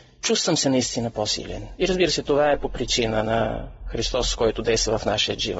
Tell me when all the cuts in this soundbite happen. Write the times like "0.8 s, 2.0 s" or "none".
none